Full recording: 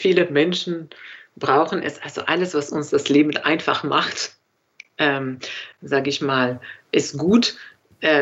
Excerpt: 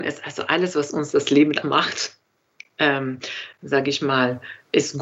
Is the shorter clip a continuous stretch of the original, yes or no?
no